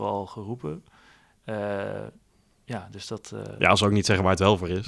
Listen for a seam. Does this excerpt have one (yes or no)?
no